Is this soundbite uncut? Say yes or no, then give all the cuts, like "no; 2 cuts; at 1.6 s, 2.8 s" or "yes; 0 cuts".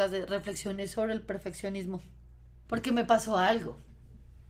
no; 1 cut; at 2.6 s